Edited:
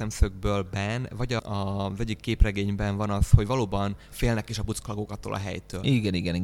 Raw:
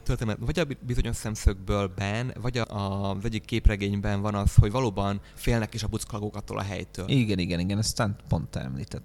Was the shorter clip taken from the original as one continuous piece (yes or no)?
yes